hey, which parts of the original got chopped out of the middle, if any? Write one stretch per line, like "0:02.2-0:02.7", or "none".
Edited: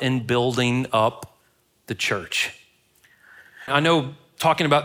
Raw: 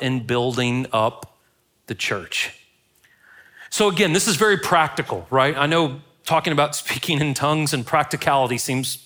0:03.7-0:05.5

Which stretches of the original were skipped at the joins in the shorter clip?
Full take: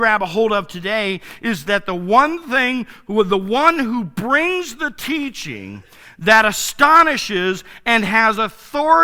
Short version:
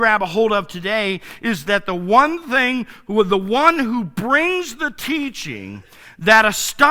none

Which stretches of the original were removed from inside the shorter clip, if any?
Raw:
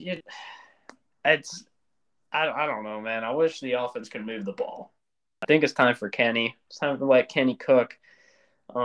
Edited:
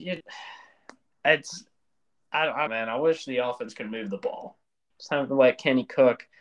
0:02.7-0:03.0
0:05.3-0:06.6

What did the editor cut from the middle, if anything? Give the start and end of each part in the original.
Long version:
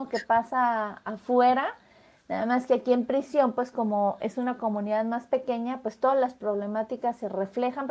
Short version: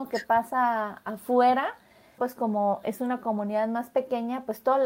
0:02.2-0:03.5

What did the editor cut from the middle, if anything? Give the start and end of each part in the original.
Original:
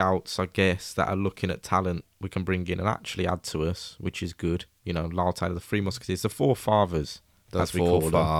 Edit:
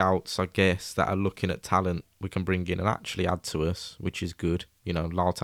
none

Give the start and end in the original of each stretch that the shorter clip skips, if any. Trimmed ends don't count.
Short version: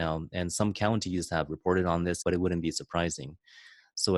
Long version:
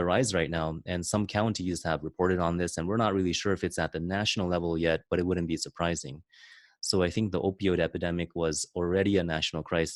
0:02.8-0:05.1

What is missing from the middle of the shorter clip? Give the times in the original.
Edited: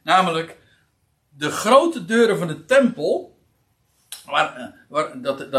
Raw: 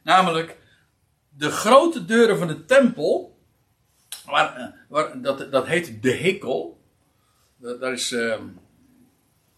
none

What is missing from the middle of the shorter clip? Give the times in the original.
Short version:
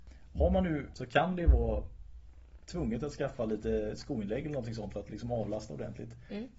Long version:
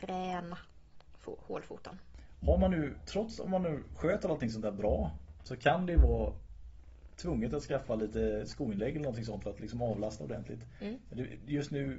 0:03.0-0:05.4

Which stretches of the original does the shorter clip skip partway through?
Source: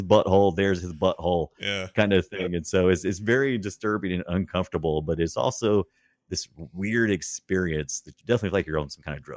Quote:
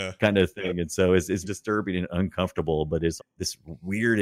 0:03.2-0:03.6
0:05.3-0:06.1

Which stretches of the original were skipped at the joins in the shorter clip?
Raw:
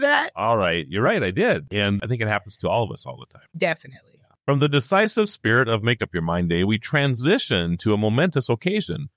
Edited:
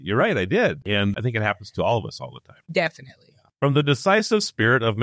none

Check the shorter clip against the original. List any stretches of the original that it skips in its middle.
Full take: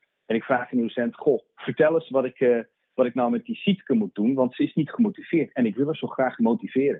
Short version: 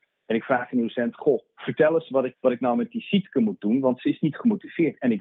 0:02.3-0:02.9

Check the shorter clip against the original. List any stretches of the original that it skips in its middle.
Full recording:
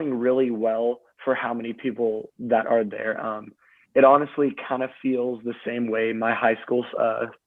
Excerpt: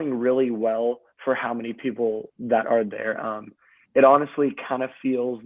none

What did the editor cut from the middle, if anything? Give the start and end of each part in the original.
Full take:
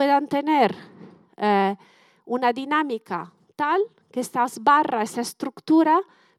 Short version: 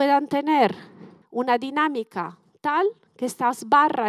0:01.2-0:02.2

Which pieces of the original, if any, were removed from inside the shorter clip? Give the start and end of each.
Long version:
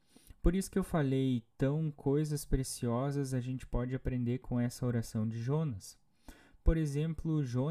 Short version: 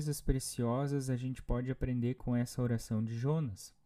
none

